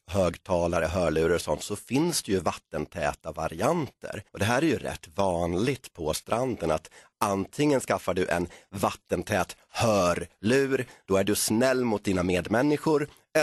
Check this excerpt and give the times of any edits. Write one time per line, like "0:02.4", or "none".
0:04.3